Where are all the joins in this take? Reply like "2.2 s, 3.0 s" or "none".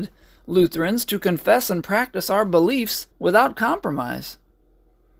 3.1 s

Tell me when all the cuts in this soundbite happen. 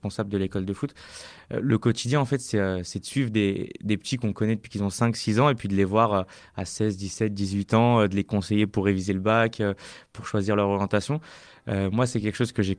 none

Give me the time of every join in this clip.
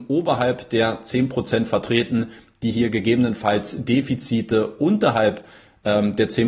none

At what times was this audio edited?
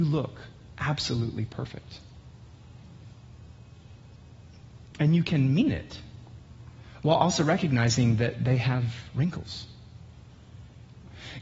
none

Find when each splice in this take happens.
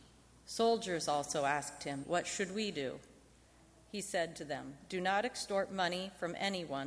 2.0 s

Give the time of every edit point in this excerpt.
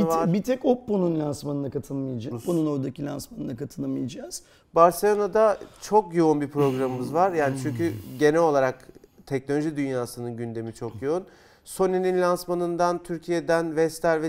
2.3 s, 4.6 s

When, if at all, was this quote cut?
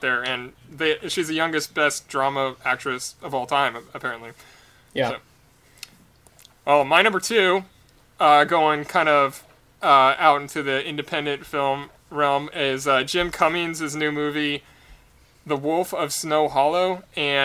none

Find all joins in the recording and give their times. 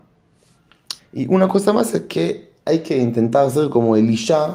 1.0 s

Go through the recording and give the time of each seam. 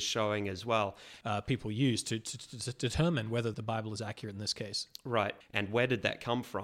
1.2 s, 3.5 s, 5.4 s

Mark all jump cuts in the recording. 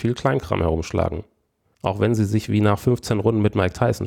1.7 s

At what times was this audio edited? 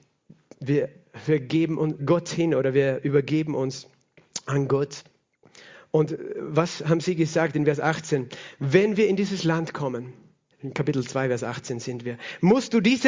2.0 s

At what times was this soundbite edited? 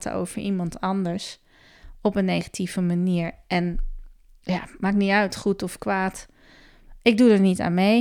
none

